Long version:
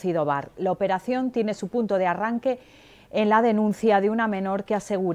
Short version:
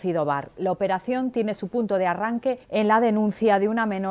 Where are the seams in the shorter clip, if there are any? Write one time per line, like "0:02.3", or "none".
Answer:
0:02.6